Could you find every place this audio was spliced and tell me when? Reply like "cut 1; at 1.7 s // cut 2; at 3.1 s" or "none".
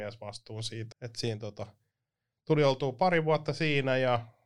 cut 1; at 0.9 s

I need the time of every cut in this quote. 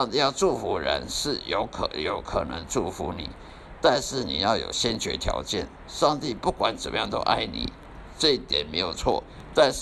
none

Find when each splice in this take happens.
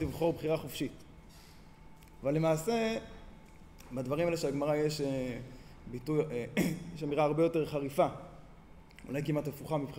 cut 1; at 2.2 s

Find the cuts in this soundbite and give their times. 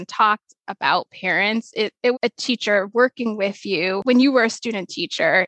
cut 1; at 2.1 s

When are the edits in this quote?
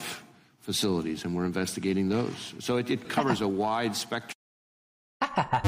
cut 1; at 3.0 s

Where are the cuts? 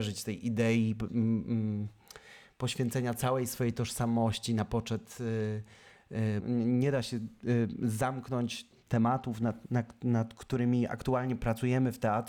cut 1; at 6.4 s

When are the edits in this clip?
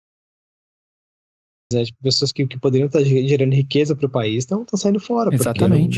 cut 1; at 1.7 s

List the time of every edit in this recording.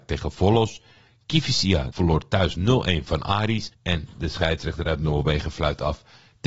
cut 1; at 1.9 s // cut 2; at 3.7 s

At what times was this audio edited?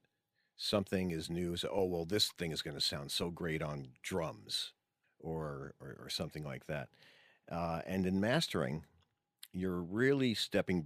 none

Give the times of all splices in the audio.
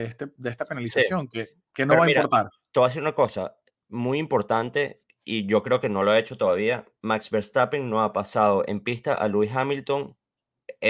none

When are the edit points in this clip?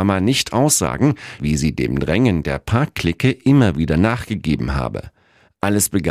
cut 1; at 1.4 s

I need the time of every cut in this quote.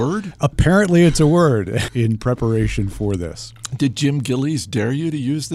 cut 1; at 1.9 s

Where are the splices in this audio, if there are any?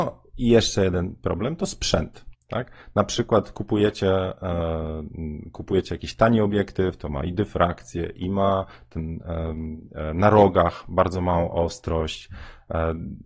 cut 1; at 2.3 s

